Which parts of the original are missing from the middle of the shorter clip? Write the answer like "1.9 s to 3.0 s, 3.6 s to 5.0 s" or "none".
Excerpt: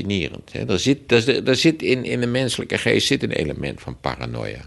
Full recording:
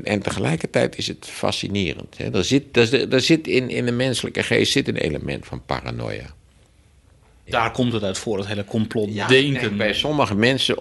none